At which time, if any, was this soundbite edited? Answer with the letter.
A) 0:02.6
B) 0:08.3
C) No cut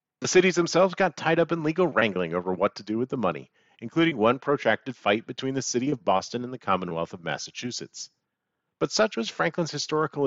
C